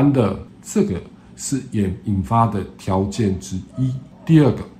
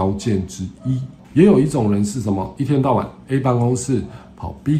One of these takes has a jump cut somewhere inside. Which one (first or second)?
second